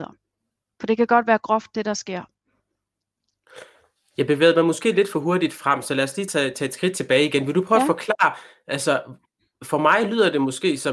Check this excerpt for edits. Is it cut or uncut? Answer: uncut